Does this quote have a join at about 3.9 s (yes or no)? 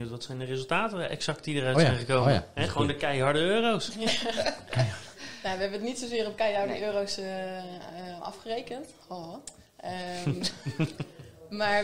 no